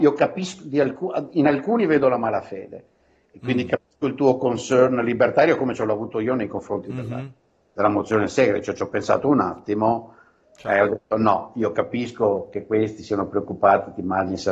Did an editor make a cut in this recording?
no; 0 cuts

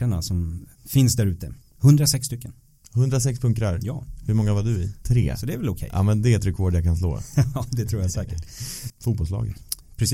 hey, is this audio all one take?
no; 2 cuts; at 5.0 s, 8.9 s

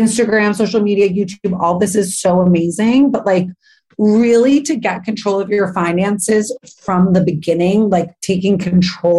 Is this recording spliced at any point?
no; 0 cuts

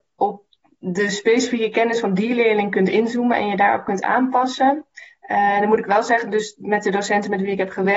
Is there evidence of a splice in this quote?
no; 0 cuts

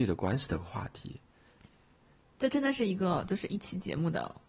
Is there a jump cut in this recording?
no; 0 cuts

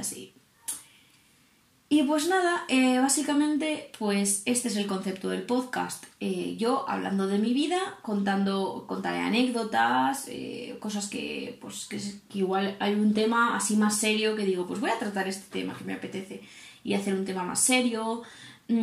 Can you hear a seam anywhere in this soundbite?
no; 0 cuts

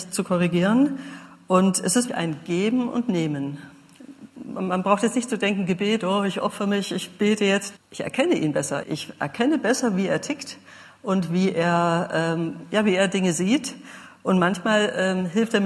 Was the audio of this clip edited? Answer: yes; 3 cuts; at 2.1 s, 7.8 s, 8.8 s

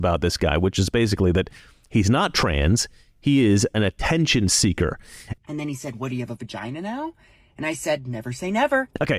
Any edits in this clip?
yes; 1 cut; at 5.4 s

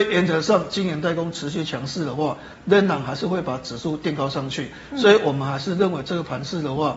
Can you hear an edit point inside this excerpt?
no; 0 cuts

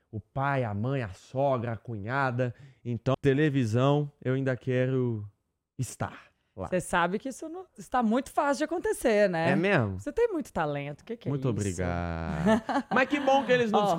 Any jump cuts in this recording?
yes; 1 cut; at 3.1 s

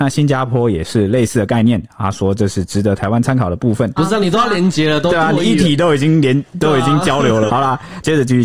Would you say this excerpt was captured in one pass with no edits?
no; 2 cuts; at 4.0 s, 7.5 s

